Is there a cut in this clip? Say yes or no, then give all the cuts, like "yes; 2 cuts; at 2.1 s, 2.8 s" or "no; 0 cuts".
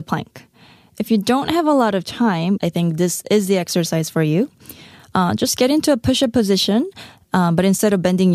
yes; 1 cut; at 2.6 s